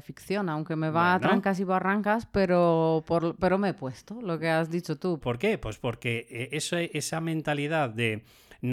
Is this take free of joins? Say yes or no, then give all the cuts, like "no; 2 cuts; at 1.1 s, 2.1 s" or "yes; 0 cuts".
no; 1 cut; at 5.2 s